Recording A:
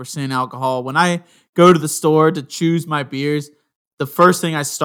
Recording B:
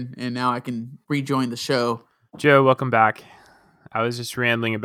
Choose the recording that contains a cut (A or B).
B